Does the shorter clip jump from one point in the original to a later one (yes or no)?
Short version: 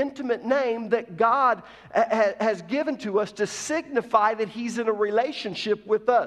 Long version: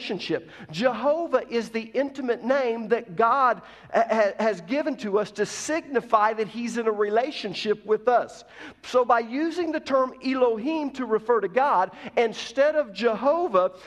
no